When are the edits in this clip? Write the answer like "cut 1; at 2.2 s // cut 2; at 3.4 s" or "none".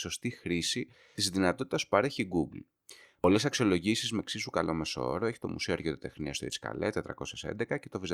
none